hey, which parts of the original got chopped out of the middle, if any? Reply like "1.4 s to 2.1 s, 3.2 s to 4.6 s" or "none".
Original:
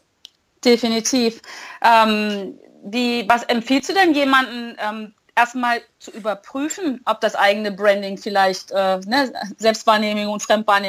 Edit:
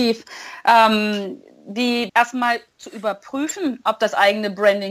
3.3 s to 5.3 s